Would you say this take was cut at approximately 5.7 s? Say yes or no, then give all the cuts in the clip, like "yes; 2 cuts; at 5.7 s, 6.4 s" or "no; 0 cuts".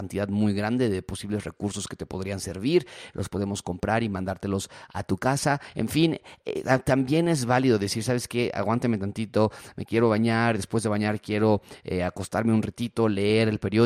no; 0 cuts